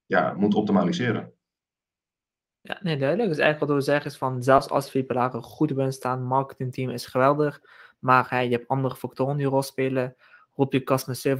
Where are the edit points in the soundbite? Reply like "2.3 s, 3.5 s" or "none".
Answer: none